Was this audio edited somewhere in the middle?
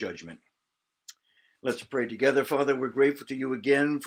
no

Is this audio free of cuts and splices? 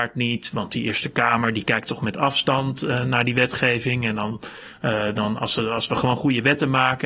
yes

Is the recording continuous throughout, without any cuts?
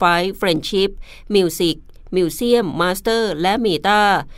yes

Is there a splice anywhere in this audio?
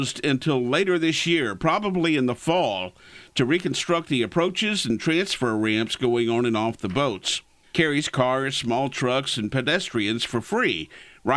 yes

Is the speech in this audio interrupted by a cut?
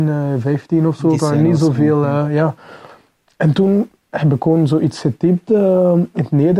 no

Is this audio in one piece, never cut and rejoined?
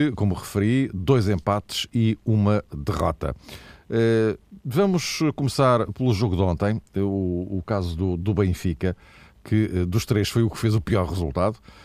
yes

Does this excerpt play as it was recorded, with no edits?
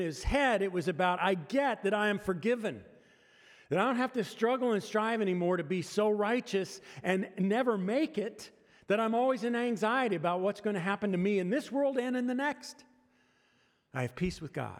yes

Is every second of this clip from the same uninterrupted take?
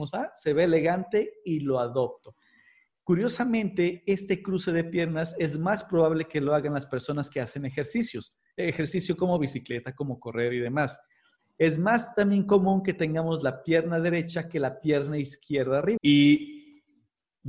no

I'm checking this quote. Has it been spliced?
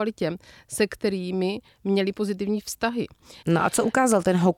yes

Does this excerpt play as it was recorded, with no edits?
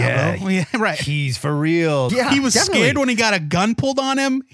no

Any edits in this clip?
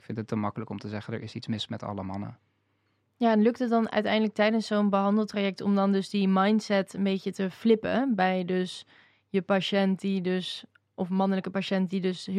no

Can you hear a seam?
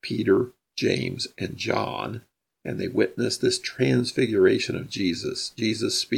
no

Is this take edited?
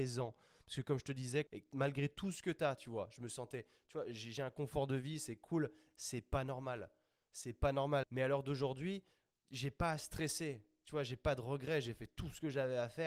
yes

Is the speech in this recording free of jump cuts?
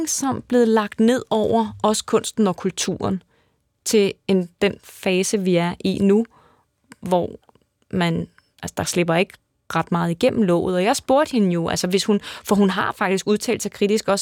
yes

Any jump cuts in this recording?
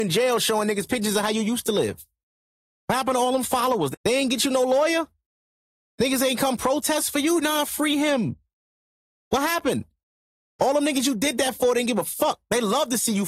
yes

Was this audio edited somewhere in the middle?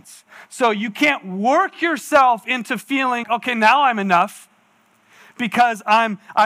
yes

